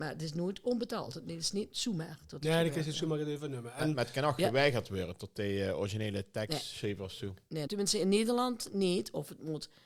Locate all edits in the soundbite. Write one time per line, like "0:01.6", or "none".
0:07.7